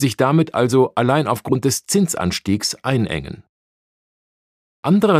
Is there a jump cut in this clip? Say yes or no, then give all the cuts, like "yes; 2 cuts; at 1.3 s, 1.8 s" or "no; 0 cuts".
no; 0 cuts